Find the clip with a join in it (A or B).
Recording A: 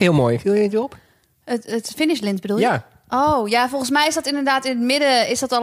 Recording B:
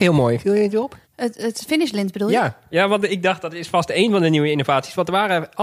B